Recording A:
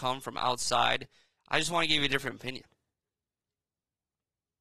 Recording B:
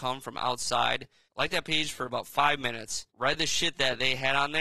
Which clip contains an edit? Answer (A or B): B